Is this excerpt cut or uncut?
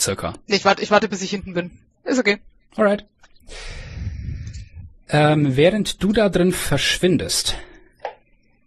uncut